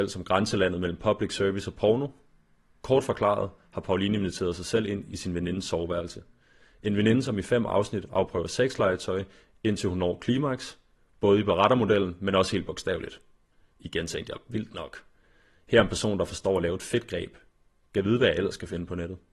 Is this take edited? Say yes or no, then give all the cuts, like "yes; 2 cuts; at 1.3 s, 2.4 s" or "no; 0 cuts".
no; 0 cuts